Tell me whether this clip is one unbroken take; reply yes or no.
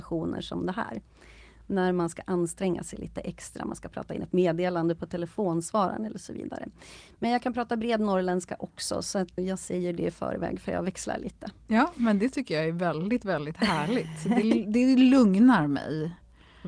no